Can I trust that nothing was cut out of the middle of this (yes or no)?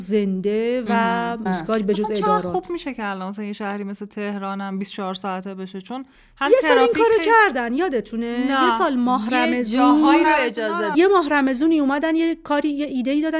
no